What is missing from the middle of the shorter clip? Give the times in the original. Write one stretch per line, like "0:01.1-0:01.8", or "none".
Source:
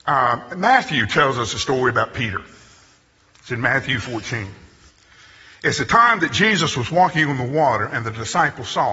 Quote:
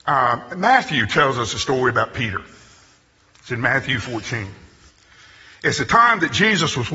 none